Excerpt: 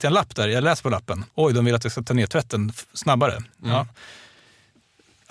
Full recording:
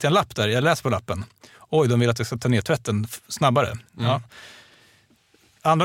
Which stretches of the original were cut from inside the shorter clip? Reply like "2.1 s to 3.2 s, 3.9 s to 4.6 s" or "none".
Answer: 1.3 s to 1.7 s